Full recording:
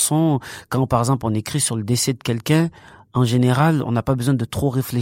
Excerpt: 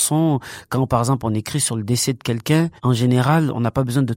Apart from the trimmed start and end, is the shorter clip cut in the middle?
yes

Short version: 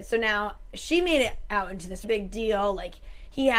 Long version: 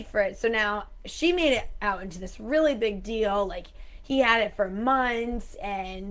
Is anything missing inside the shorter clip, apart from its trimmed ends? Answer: yes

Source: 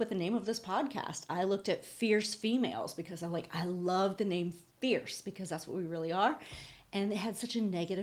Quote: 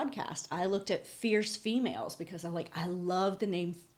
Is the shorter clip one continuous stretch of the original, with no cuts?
yes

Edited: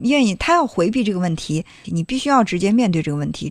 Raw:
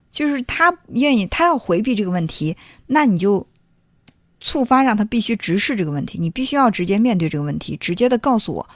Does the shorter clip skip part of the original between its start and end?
yes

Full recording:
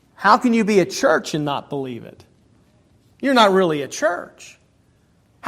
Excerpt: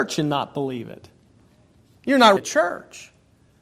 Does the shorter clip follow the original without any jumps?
no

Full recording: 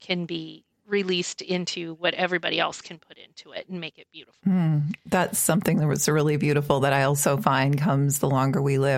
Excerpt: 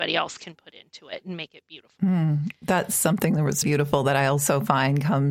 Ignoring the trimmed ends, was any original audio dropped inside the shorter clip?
yes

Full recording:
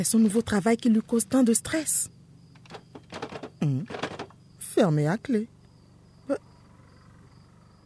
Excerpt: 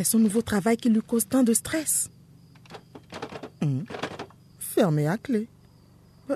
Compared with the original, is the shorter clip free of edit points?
yes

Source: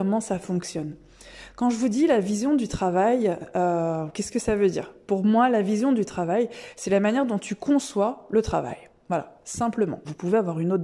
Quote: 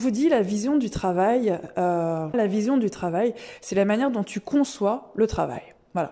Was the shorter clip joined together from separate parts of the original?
yes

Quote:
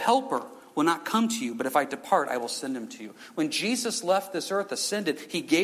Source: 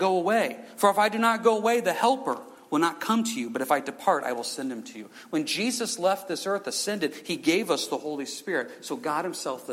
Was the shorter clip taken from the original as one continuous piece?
yes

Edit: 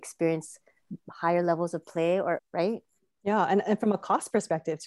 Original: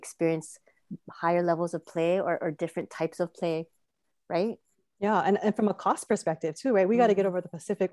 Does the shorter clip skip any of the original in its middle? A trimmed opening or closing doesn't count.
yes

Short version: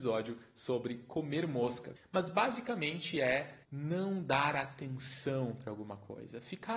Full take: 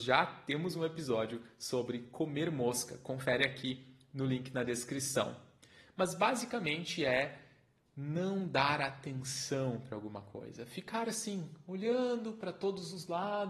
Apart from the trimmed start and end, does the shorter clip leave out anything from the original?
yes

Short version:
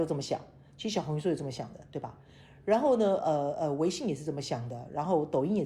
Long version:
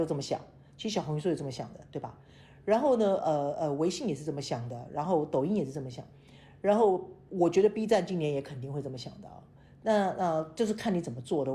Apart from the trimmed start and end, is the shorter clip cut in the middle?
no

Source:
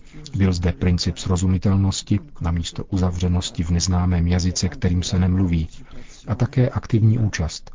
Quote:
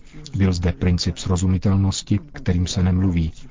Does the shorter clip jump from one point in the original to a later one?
yes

